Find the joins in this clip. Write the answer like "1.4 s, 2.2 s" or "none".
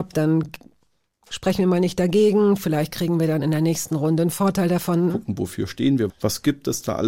5.1 s, 6.1 s